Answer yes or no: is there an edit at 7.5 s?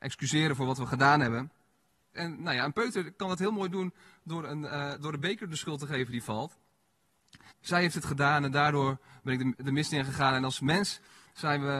yes